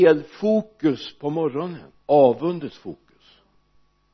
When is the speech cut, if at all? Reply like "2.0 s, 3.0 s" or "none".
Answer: 2.0 s